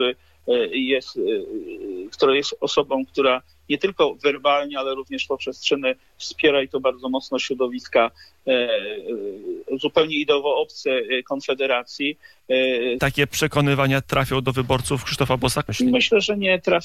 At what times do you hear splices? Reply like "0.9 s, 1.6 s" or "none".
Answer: 13.0 s, 15.7 s